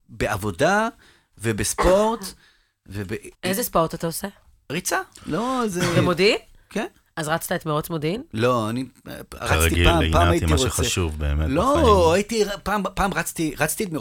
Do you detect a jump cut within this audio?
yes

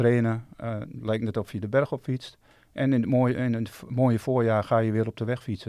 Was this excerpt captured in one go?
yes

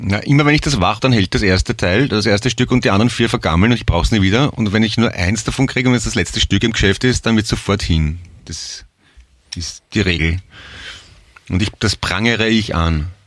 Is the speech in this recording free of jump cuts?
no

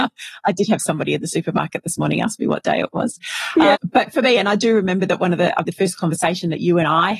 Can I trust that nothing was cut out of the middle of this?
no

